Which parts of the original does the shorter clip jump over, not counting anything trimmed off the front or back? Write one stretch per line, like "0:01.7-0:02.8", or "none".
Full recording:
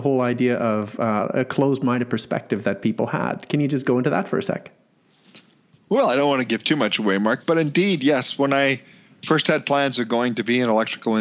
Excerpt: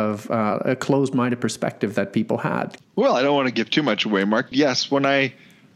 0:03.5-0:05.7
0:07.5-0:08.0